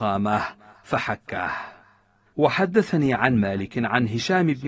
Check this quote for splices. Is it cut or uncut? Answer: cut